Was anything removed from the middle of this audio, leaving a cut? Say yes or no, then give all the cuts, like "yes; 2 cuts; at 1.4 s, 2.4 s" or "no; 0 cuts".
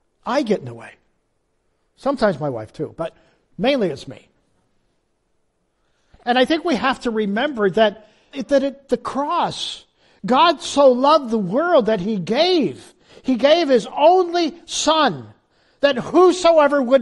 yes; 1 cut; at 8.3 s